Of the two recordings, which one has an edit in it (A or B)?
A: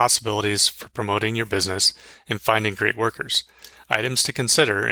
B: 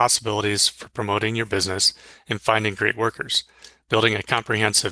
A